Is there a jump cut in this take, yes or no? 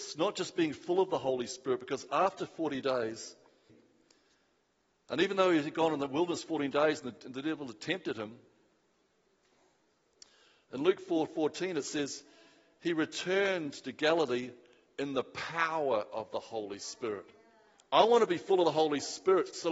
yes